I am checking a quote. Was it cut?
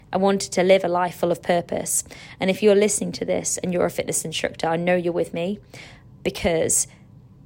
no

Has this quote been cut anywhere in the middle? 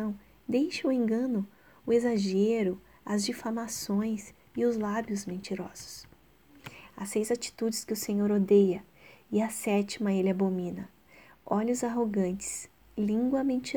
no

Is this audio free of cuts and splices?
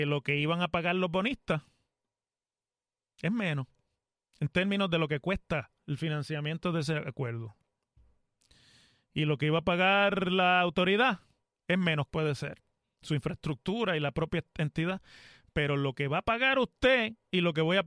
no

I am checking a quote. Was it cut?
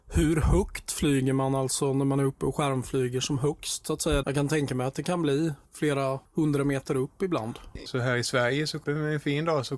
yes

